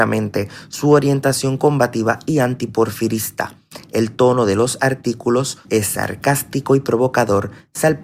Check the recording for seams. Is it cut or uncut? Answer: cut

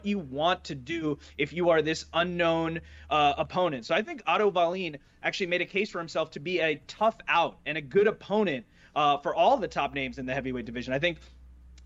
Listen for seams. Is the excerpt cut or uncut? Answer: uncut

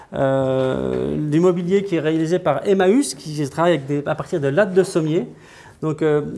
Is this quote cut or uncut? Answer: uncut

